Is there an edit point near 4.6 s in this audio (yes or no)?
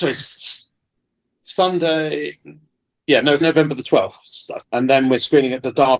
yes